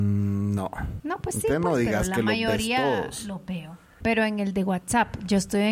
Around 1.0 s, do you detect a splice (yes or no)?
yes